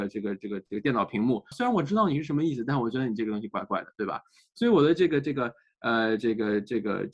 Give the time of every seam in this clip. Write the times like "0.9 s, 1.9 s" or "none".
1.5 s